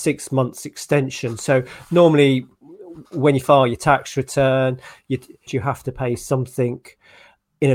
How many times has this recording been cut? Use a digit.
1